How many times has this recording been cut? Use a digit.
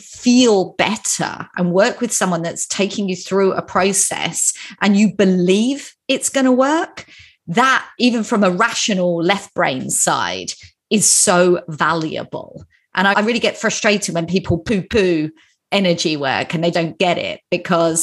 2